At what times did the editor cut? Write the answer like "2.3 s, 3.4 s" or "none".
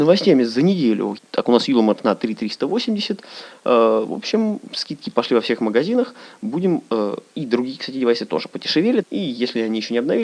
1.2 s, 9.0 s